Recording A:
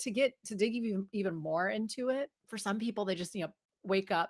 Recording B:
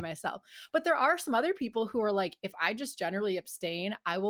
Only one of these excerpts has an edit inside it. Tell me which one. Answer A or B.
A